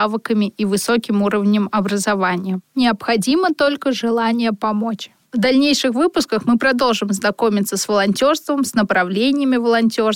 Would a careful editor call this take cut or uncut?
uncut